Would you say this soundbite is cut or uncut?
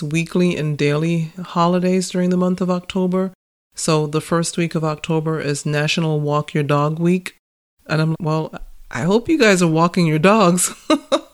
cut